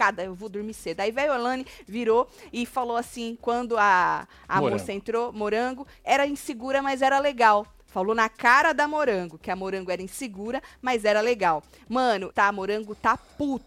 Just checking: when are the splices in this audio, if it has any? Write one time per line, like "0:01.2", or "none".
0:06.0
0:12.3